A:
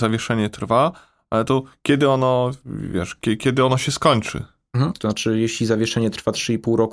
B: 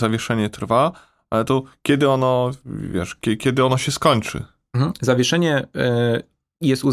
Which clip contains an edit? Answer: A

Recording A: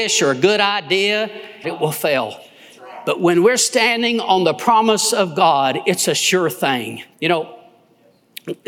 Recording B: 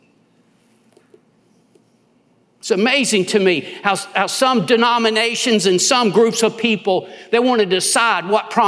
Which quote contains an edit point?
A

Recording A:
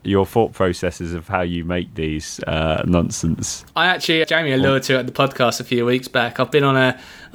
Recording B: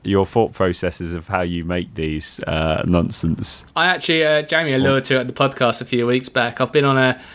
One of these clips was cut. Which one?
A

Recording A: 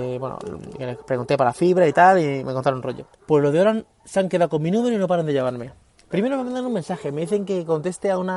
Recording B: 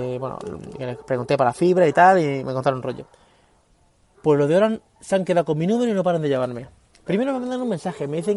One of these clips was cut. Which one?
A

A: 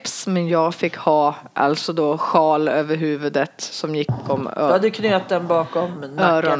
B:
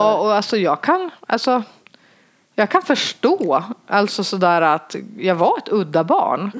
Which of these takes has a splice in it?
A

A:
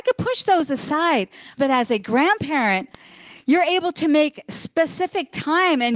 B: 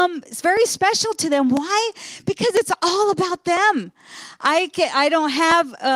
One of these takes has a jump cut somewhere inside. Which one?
A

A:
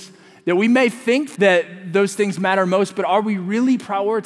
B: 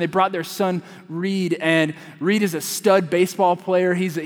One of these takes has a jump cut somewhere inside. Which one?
A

